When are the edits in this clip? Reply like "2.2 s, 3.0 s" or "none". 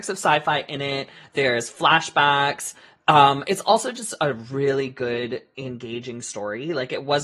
none